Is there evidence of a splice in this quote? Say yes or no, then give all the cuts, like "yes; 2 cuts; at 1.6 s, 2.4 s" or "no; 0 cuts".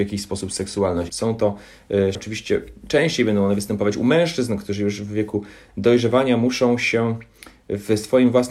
yes; 2 cuts; at 1.1 s, 2.1 s